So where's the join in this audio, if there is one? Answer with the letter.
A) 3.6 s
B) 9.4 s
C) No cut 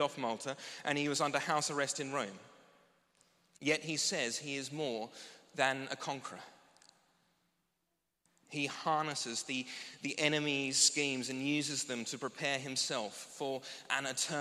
A